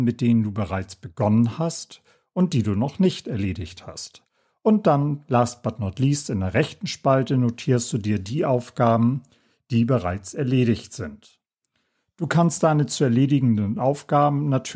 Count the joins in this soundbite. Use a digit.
0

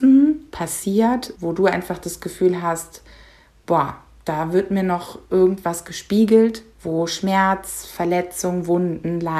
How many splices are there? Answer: 2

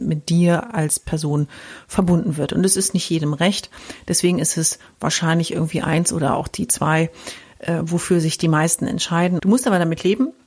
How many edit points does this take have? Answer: 1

